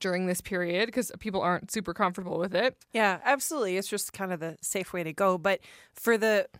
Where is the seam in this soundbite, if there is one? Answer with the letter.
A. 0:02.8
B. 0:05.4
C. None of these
C